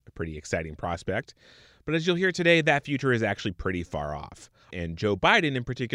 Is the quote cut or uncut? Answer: cut